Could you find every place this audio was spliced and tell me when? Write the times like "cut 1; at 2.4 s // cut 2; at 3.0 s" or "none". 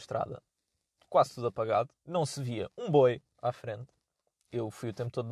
cut 1; at 2.0 s